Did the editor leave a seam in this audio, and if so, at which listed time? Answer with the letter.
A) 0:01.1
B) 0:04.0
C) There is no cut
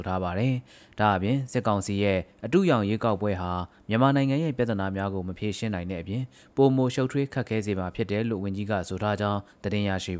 C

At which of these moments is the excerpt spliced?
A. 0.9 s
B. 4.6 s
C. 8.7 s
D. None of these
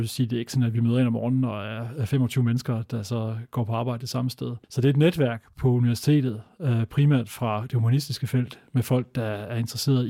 B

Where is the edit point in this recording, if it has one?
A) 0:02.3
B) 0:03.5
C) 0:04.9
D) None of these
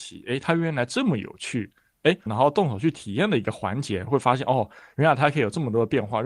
A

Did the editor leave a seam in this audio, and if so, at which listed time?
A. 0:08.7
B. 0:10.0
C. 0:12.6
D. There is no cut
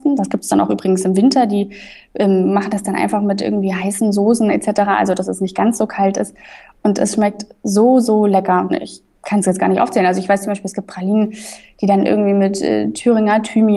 A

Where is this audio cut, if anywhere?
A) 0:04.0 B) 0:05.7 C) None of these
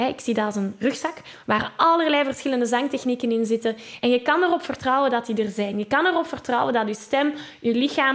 C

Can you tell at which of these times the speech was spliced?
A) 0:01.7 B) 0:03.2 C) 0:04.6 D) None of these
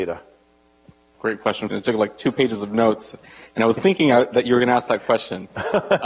A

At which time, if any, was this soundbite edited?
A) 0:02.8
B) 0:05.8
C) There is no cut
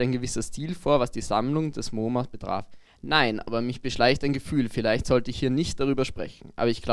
A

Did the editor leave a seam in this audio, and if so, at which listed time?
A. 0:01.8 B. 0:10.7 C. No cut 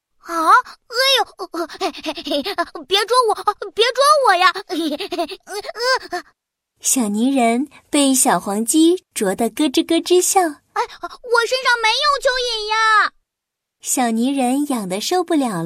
B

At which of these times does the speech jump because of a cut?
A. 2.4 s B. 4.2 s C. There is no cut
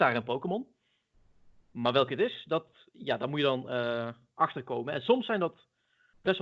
C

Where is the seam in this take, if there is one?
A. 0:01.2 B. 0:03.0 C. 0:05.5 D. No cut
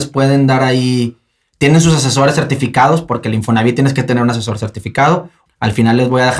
C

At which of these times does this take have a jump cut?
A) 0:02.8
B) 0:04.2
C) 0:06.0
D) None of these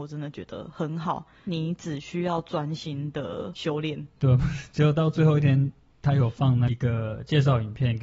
B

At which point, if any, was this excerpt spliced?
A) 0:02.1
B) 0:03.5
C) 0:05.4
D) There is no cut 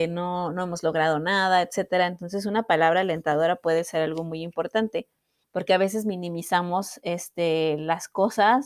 C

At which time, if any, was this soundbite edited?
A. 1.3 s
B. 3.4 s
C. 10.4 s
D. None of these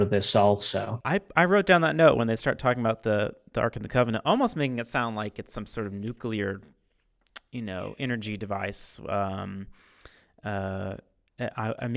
D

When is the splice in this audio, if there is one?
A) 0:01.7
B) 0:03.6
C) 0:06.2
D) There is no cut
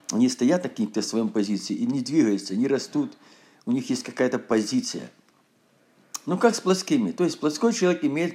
D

